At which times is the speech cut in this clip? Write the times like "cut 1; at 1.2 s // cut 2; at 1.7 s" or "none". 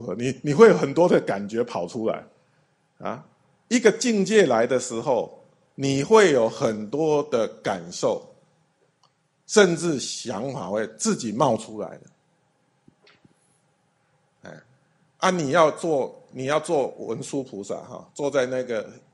none